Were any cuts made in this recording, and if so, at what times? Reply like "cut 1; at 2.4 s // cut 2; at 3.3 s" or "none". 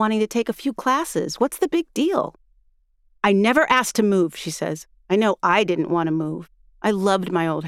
cut 1; at 3.1 s // cut 2; at 5.0 s